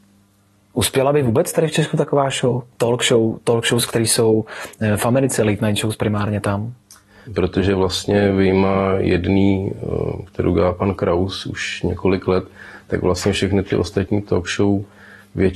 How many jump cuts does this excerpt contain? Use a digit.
1